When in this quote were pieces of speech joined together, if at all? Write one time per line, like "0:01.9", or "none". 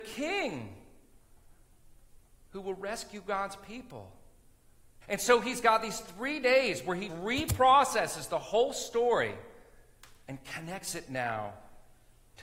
0:05.0
0:07.1